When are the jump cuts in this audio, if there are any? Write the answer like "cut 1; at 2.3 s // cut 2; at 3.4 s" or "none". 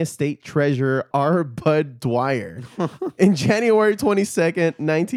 none